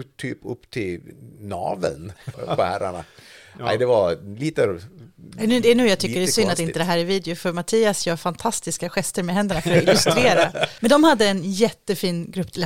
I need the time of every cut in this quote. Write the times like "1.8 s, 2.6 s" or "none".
2.3 s, 10.8 s